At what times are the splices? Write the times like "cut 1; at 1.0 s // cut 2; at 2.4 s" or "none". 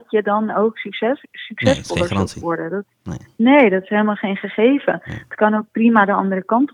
none

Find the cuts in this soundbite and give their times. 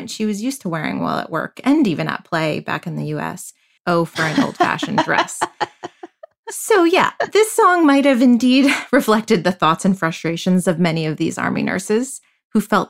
cut 1; at 3.8 s

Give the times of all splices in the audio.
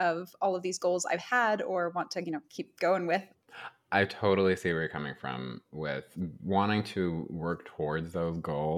none

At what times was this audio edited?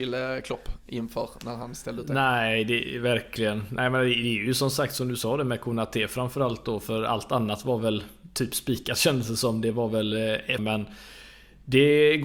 cut 1; at 10.6 s

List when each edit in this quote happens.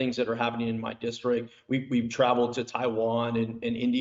none

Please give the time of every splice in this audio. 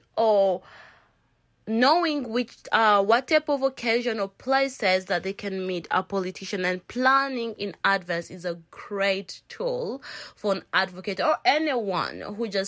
none

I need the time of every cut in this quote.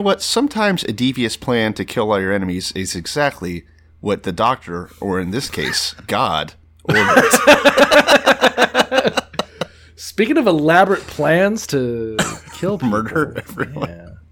none

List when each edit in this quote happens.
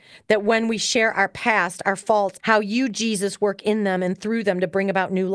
cut 1; at 2.4 s

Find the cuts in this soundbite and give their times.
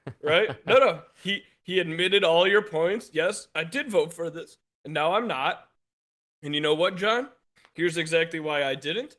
none

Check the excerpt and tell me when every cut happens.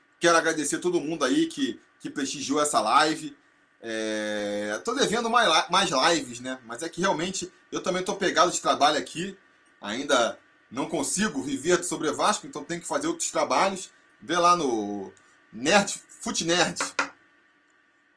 cut 1; at 14.1 s

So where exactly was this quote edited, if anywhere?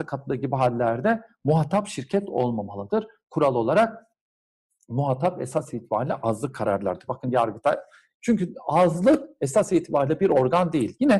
cut 1; at 3.2 s // cut 2; at 7.1 s

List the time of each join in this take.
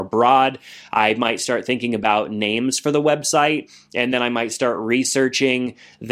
none

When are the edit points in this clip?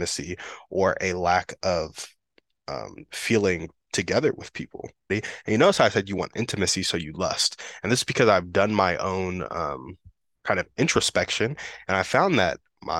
cut 1; at 5.1 s

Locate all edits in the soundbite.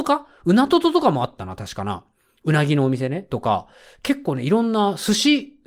none

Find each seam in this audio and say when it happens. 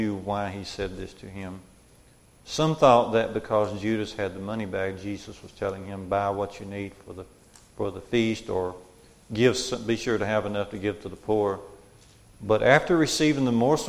cut 1; at 2.4 s

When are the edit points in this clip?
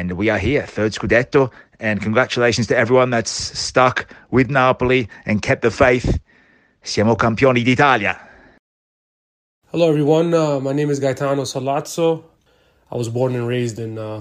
none

